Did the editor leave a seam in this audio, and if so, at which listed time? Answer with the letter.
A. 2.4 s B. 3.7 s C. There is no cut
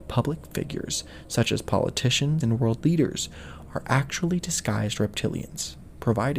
A